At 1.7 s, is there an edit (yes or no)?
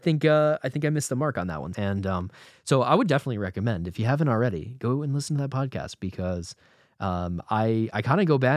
yes